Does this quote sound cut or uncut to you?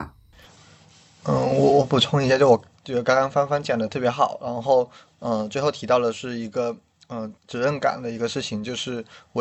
cut